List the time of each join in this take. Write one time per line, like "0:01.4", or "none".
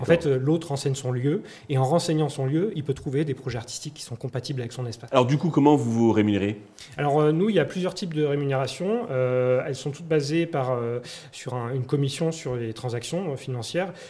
0:05.1